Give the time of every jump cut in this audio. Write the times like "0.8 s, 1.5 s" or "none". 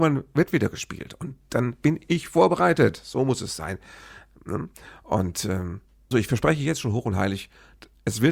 6.1 s